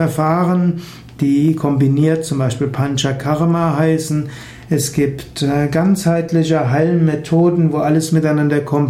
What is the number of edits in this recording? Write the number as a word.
zero